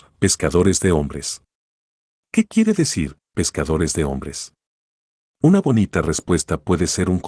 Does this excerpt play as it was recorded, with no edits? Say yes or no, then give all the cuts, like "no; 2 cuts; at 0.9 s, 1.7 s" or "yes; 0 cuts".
yes; 0 cuts